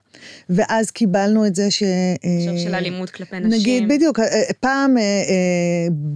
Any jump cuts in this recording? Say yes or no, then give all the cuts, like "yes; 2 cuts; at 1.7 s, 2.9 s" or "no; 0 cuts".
no; 0 cuts